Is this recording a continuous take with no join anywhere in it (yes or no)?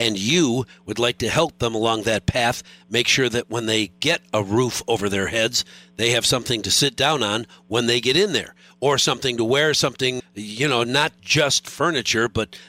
no